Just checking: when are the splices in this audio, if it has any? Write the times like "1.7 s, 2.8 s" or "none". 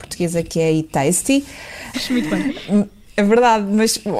1.9 s